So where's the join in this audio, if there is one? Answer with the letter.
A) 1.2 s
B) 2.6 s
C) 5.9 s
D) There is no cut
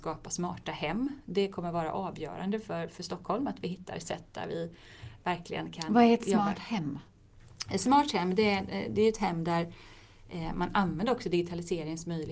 D